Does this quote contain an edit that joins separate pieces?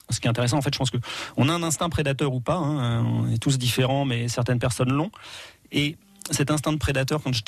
no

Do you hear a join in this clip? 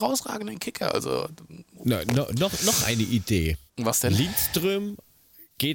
yes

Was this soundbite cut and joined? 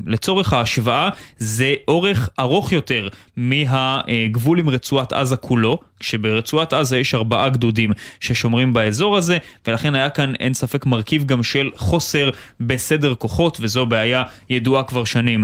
no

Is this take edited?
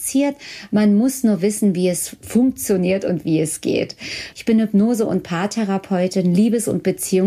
yes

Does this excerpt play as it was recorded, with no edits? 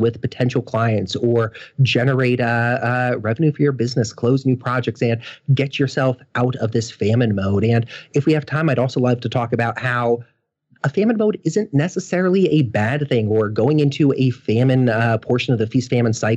yes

